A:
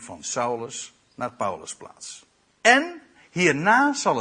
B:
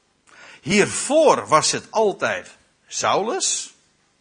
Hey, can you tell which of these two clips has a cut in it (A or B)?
A